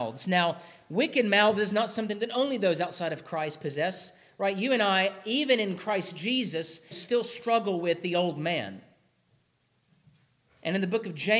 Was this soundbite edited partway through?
yes; 1 cut; at 6.9 s

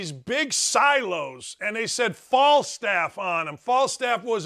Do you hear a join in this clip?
no; 0 cuts

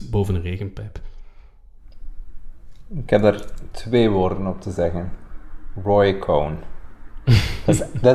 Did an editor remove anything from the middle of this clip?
no; 0 cuts

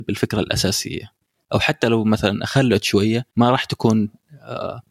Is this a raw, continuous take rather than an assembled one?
no; 1 cut; at 3.3 s

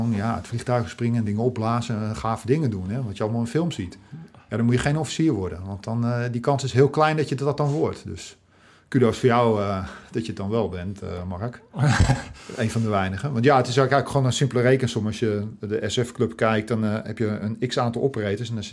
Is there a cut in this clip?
no; 0 cuts

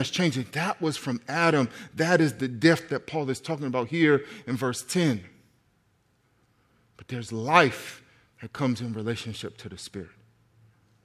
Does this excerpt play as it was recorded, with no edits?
yes; 0 cuts

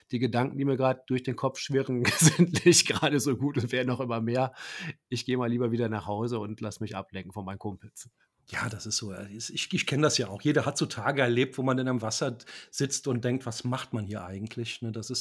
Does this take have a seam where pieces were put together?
no; 0 cuts

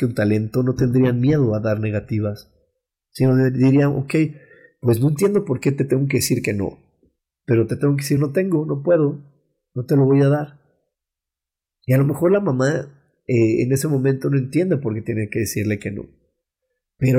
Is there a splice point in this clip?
no; 0 cuts

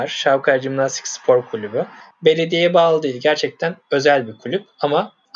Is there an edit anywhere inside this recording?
no; 0 cuts

